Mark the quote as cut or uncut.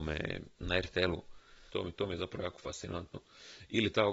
cut